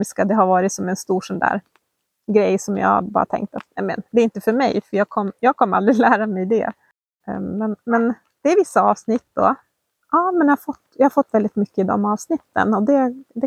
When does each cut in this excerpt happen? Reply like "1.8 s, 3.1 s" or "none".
4.1 s, 7.2 s, 10.0 s